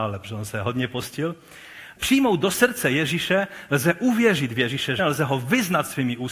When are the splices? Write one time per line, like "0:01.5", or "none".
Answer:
0:02.0
0:05.0